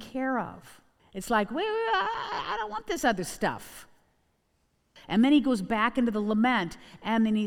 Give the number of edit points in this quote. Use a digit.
2